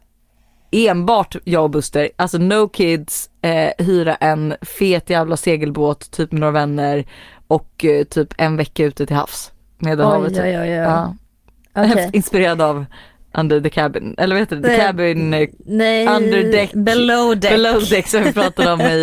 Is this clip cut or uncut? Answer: uncut